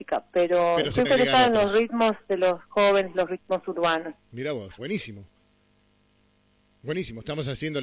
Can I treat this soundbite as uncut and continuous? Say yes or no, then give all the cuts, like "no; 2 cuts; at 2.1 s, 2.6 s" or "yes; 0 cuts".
no; 2 cuts; at 1.0 s, 4.8 s